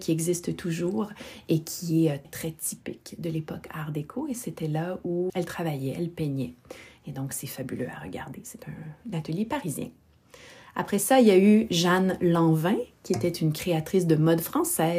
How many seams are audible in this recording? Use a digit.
2